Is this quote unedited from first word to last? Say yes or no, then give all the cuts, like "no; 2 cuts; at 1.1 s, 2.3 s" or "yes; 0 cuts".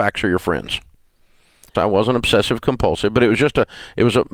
no; 1 cut; at 1.7 s